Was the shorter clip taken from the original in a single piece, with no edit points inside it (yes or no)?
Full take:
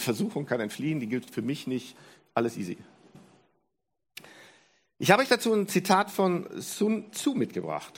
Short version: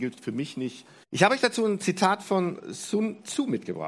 no